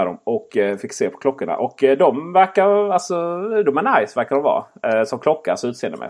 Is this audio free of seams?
yes; 0 cuts

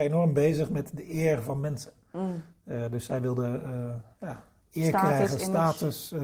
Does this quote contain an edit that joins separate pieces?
no; 0 cuts

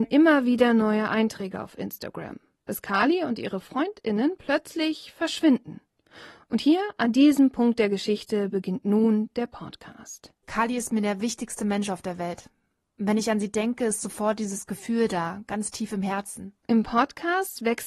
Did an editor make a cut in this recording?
yes; 1 cut; at 10.4 s

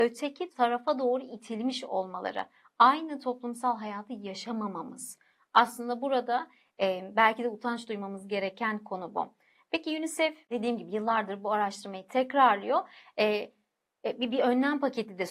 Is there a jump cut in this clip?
no; 0 cuts

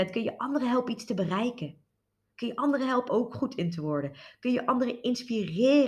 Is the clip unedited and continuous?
no; 1 cut; at 3.1 s

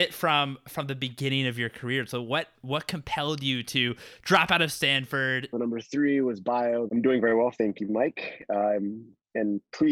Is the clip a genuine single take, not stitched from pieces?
no; 2 cuts; at 5.5 s, 6.9 s

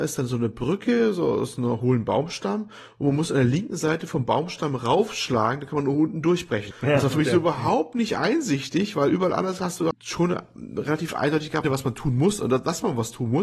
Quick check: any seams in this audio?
yes; 3 cuts; at 6.7 s, 9.9 s, 11.6 s

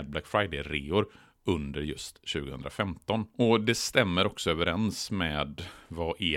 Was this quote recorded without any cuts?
yes; 0 cuts

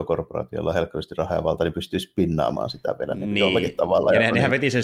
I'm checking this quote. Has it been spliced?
no; 0 cuts

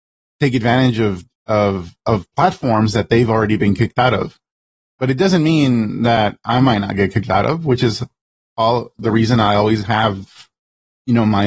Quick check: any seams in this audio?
no; 0 cuts

